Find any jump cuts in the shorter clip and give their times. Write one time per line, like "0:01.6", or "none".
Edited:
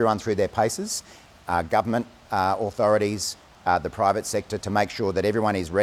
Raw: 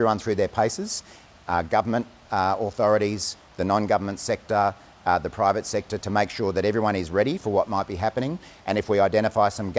0:03.5

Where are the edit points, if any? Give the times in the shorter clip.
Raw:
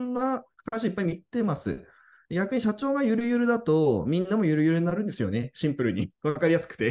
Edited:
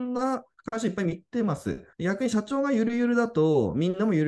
0:01.9

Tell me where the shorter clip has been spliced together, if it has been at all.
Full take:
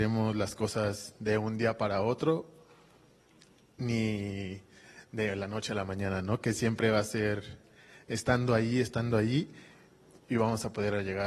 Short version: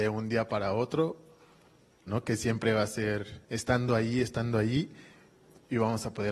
0:02.1
0:03.4

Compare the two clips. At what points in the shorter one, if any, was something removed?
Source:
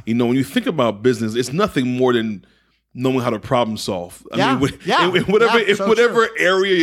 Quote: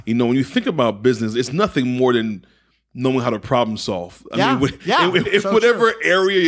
0:05.2

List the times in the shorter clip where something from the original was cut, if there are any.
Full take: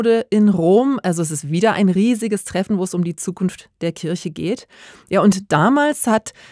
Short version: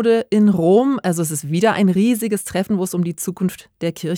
none

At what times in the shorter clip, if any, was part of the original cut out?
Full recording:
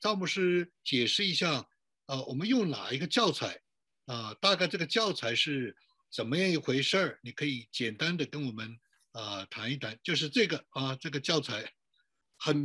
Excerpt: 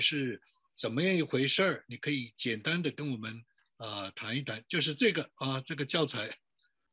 none

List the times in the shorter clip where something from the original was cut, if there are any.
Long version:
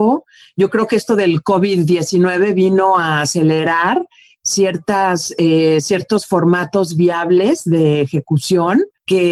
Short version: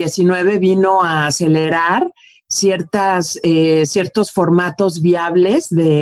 none

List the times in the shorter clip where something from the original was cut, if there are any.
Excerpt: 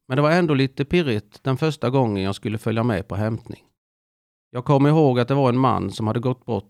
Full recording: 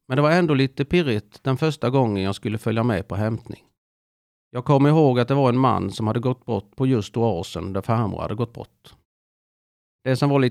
none

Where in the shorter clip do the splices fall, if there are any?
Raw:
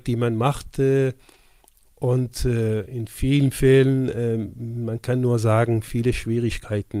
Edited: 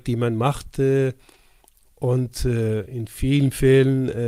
none

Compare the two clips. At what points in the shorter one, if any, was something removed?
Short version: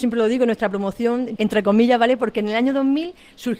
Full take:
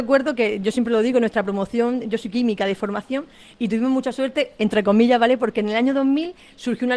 0:01.4

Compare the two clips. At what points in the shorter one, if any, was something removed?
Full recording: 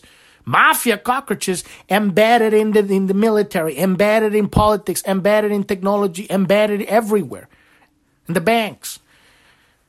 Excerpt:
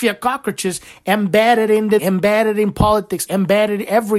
0:02.0
0:03.3

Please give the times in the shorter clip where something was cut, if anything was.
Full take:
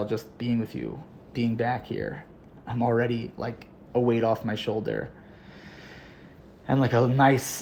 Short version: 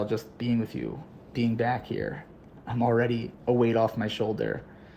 0:03.3

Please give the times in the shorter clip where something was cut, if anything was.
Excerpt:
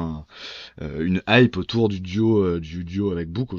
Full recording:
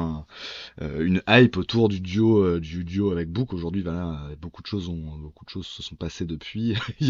none

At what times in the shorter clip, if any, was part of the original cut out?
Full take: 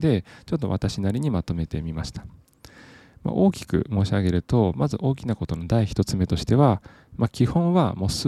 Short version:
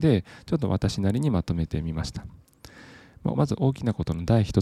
0:03.3

